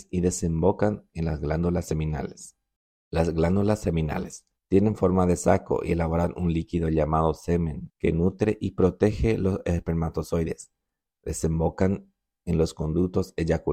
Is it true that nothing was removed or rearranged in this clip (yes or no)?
no